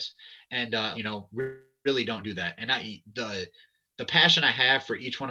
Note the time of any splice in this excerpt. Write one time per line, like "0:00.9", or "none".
0:00.9